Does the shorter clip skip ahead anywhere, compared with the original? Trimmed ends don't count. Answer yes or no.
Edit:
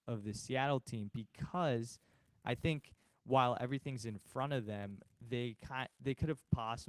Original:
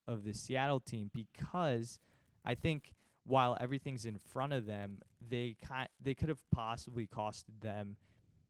no